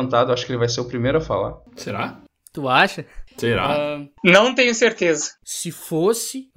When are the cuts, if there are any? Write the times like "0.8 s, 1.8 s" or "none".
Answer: 3.3 s, 5.4 s